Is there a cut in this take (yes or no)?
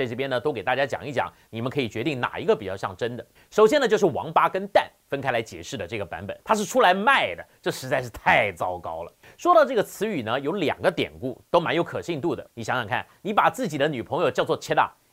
yes